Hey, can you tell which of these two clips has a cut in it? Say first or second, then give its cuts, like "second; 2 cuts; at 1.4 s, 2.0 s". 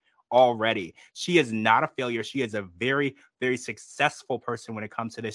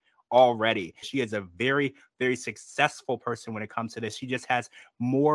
second; 1 cut; at 1.0 s